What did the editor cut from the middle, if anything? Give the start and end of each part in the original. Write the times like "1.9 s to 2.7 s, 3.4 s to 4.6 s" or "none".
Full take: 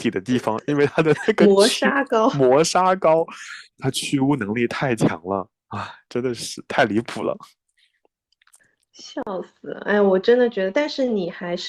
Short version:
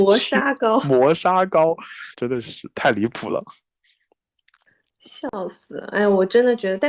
3.6 s to 6.1 s